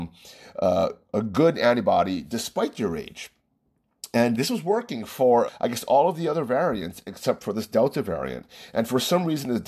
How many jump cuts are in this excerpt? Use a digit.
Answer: 2